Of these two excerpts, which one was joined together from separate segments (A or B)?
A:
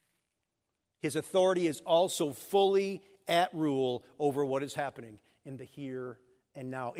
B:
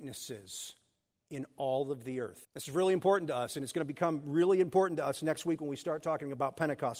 B